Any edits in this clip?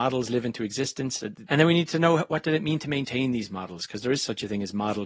yes; 1 cut; at 1.5 s

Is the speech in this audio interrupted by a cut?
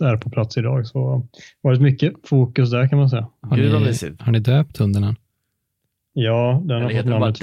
no; 0 cuts

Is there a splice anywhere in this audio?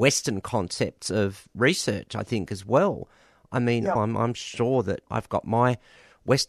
yes; 2 cuts; at 4.0 s, 5.1 s

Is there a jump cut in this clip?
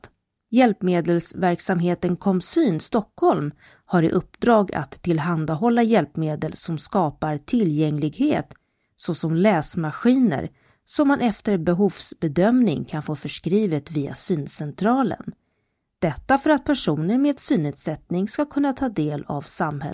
no; 0 cuts

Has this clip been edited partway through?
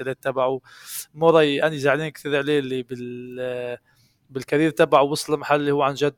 no; 0 cuts

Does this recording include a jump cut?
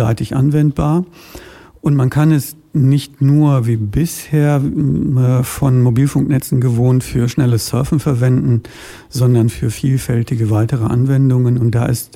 no; 0 cuts

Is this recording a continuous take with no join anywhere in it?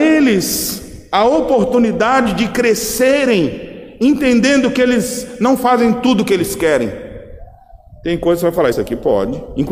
no; 1 cut; at 8.7 s

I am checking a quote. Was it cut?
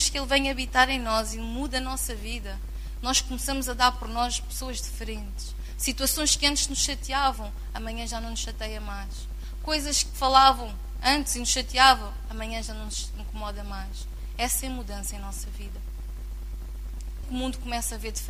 yes; 1 cut; at 17.2 s

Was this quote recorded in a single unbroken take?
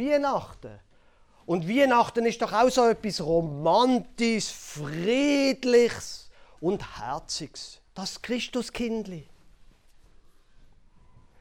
yes; 0 cuts

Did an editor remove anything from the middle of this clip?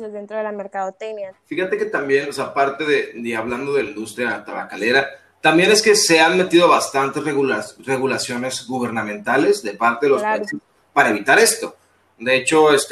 yes; 1 cut; at 1.3 s

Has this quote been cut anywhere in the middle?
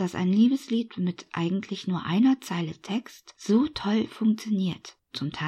no; 0 cuts

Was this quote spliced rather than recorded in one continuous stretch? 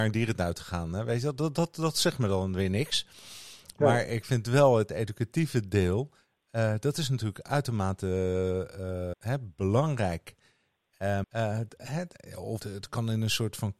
yes; 3 cuts; at 9.1 s, 11.2 s, 12.6 s

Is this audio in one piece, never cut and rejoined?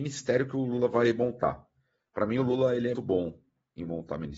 no; 1 cut; at 2.9 s

